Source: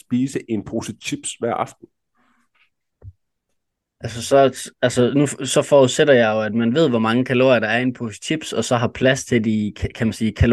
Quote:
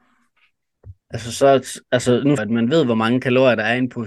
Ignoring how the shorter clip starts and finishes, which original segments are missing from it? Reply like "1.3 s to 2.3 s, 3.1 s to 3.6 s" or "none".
3.2 s to 3.9 s, 5.3 s to 6.4 s